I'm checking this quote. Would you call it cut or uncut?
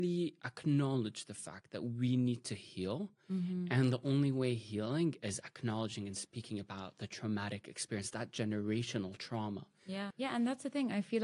cut